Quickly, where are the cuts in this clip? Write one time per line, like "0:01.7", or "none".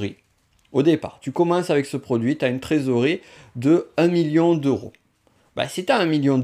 none